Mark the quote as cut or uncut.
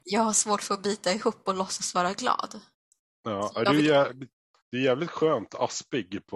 uncut